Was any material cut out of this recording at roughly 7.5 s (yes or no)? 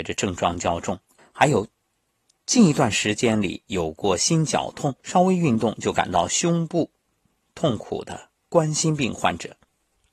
no